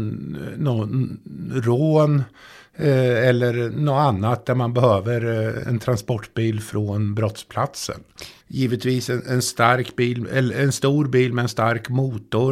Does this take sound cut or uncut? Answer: cut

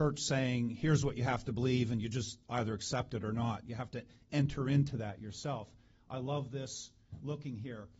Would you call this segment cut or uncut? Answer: uncut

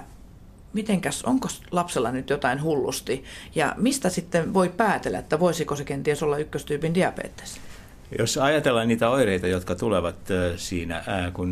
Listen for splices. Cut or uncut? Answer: uncut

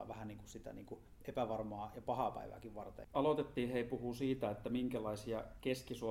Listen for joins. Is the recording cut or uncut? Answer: cut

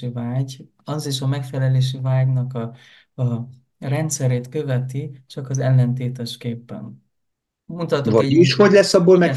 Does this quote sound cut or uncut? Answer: uncut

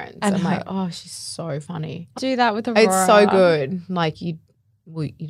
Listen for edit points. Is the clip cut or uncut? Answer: cut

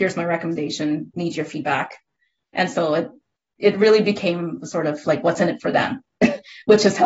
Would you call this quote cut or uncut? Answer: uncut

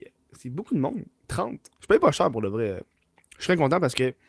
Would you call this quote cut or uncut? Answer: cut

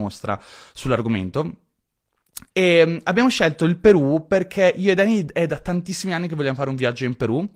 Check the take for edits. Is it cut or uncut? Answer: cut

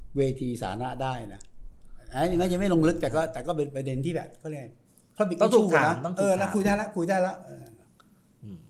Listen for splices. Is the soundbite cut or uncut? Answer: uncut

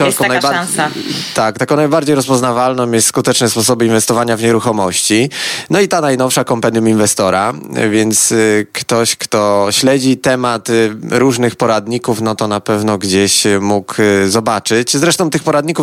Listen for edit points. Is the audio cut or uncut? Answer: uncut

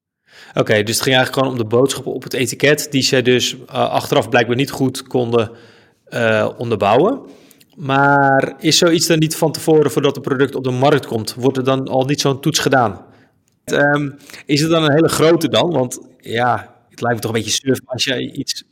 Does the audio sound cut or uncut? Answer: cut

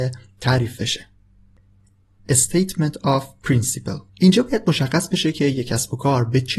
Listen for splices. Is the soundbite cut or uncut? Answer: cut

